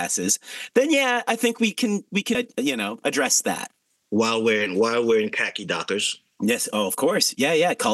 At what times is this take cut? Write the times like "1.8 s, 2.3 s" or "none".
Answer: 2.3 s